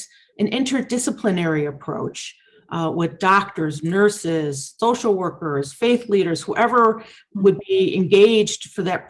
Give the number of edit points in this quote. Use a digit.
1